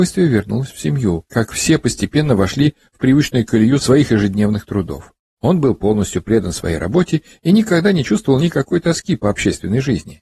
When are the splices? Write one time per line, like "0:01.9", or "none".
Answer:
0:01.3
0:05.4